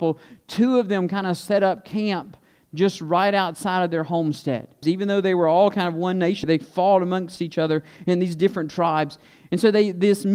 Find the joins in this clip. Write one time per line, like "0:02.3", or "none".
0:04.8
0:06.4